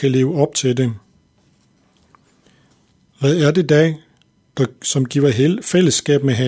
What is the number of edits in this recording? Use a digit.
0